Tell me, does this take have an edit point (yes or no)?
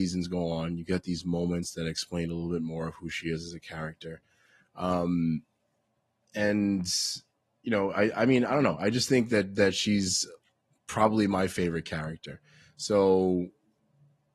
no